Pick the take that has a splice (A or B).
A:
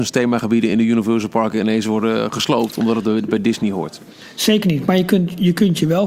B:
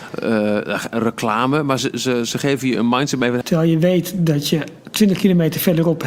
B